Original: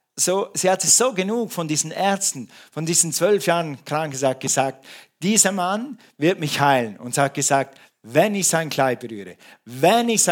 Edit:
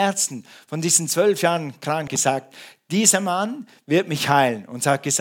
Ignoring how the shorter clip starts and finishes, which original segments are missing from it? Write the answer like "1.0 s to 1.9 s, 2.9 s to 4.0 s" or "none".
4.1 s to 4.4 s